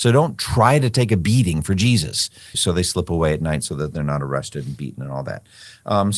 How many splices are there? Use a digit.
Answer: 1